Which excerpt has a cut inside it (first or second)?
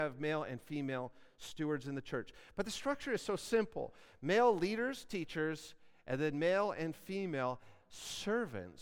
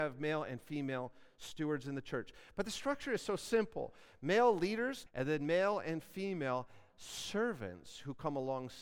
second